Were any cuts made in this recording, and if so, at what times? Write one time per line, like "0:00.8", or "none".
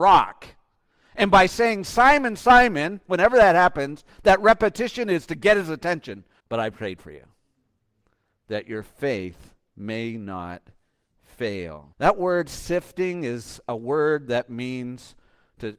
0:06.4
0:11.9